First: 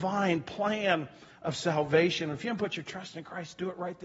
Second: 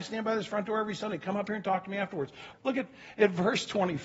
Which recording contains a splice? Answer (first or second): second